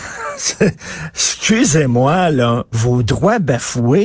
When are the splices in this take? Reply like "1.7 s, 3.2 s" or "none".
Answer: none